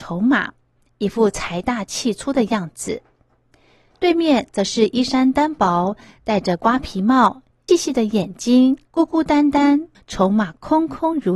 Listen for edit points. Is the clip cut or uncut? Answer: cut